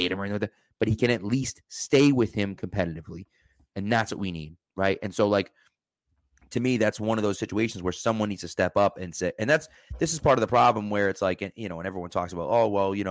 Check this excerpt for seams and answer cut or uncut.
uncut